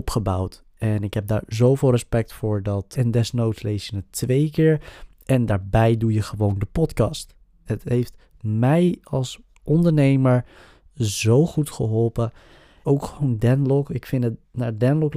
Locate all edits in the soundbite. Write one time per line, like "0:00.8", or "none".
0:02.9
0:07.7
0:12.8

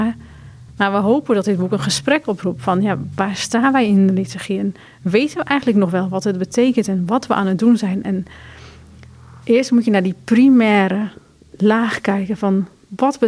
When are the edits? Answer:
none

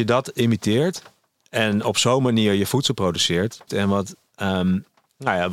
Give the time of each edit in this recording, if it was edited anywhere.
0:03.7

